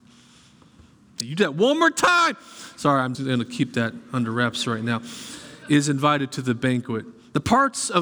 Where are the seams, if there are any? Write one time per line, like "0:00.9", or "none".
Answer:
0:03.1

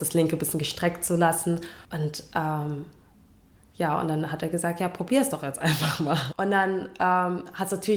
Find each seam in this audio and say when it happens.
0:01.9
0:06.3

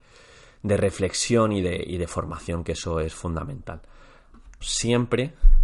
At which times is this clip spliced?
0:04.6

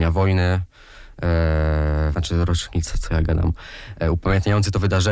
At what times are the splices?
0:02.1

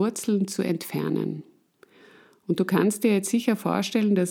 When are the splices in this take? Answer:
none

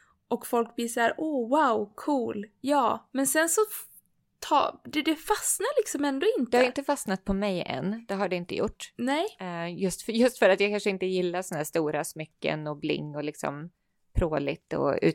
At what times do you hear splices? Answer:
none

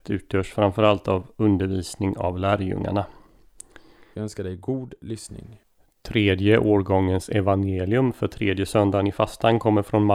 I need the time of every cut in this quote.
0:04.1

